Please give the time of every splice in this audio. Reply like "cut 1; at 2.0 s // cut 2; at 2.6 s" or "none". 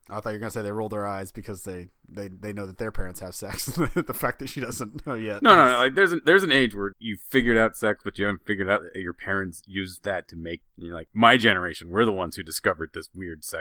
cut 1; at 6.9 s // cut 2; at 10.6 s